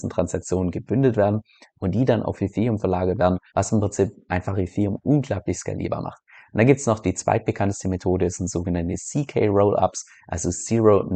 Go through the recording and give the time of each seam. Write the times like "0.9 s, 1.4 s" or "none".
3.5 s